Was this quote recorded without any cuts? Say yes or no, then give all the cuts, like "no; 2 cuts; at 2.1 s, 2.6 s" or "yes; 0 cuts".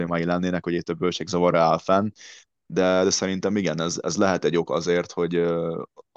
yes; 0 cuts